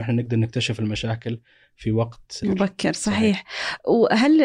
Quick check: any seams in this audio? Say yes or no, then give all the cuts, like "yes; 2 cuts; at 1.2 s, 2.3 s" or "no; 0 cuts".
yes; 1 cut; at 2.4 s